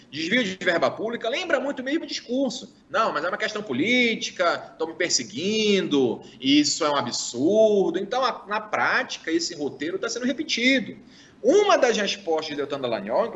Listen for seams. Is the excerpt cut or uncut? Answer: uncut